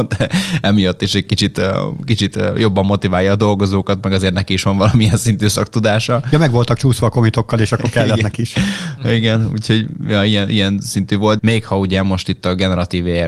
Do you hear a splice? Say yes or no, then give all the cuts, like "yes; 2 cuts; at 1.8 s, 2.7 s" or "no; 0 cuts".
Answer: yes; 1 cut; at 11.4 s